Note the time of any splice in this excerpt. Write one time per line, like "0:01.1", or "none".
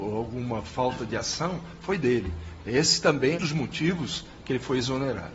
0:03.3